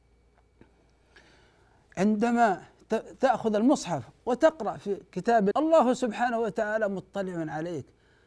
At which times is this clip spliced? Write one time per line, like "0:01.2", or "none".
0:05.5